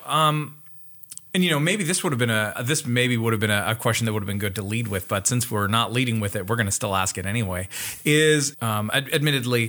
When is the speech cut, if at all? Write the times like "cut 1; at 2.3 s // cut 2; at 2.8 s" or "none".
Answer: cut 1; at 2.6 s // cut 2; at 8.5 s